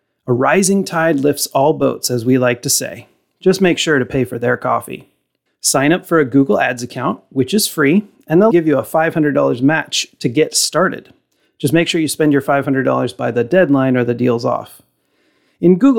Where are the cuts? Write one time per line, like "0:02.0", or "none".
0:05.5
0:08.5